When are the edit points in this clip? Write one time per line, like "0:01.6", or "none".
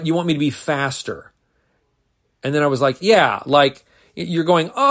none

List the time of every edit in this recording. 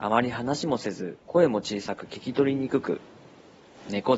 0:01.2

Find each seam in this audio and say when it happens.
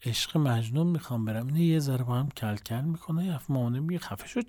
none

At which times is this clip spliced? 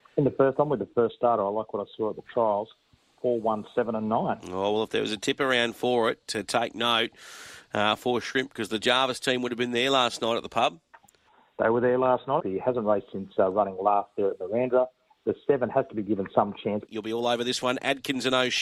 0:12.4
0:16.9

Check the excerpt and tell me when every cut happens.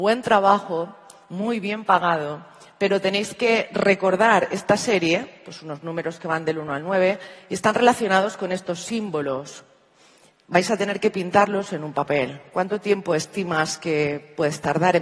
none

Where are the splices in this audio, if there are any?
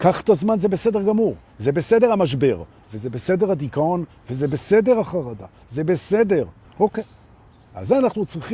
0:06.6

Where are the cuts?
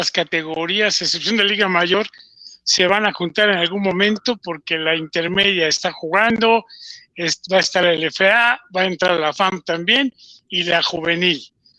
none

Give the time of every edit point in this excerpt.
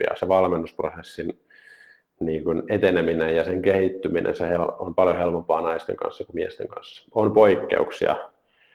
none

